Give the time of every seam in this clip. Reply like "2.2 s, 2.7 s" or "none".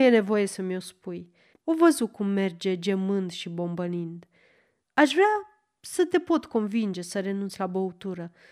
1.5 s, 4.9 s

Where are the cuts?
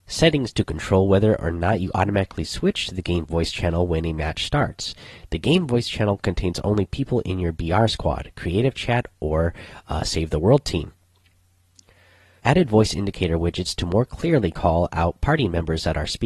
12.4 s

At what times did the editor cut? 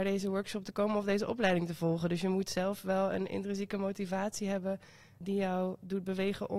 5.2 s

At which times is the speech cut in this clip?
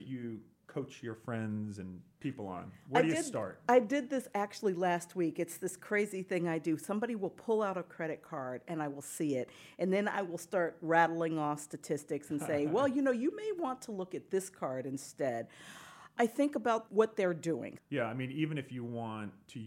17.8 s

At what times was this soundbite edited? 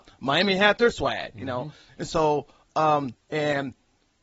3.1 s

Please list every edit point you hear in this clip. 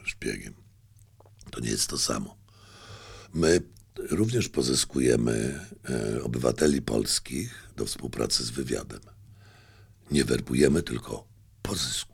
none

